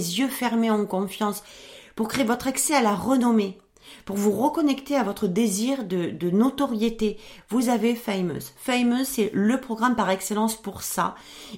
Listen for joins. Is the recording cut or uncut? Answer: uncut